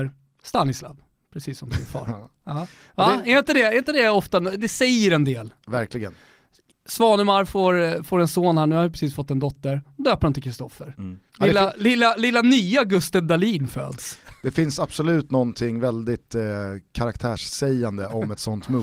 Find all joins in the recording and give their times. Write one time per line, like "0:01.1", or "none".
0:11.3

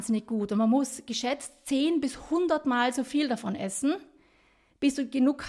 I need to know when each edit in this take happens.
none

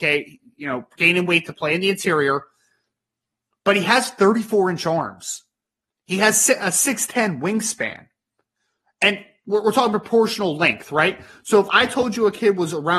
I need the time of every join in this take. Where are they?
none

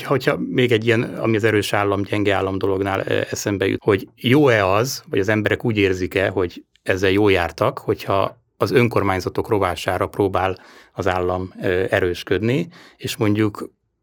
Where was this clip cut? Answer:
0:03.8

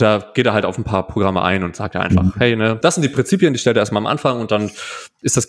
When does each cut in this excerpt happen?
0:02.8

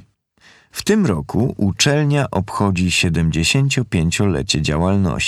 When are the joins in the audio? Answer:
none

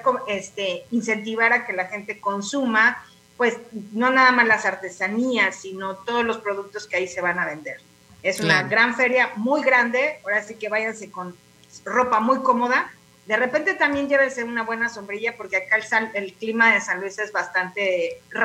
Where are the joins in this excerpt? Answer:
none

